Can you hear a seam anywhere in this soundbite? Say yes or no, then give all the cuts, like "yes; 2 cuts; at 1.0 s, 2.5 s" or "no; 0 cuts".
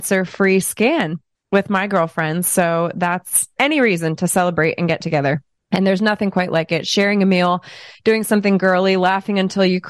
yes; 1 cut; at 3.6 s